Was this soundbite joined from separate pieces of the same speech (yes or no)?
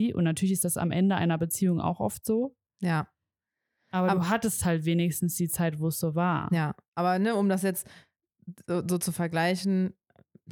no